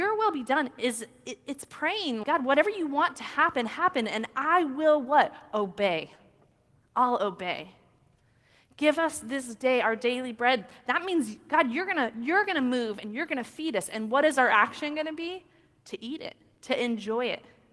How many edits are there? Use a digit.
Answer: 1